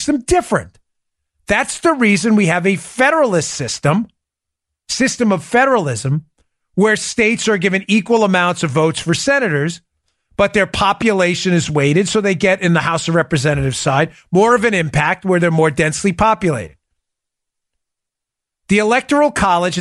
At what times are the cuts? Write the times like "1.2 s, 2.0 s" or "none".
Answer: none